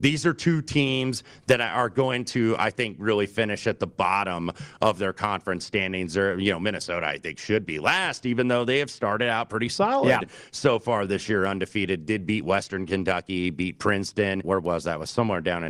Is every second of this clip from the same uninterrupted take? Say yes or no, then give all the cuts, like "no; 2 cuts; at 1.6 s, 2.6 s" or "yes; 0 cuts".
no; 1 cut; at 14.4 s